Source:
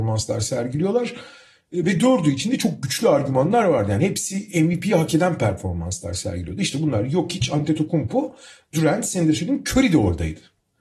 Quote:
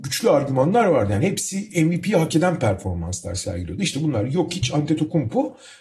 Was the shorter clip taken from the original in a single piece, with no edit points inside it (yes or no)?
yes